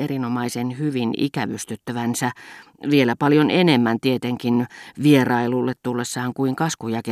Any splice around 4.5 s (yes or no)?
no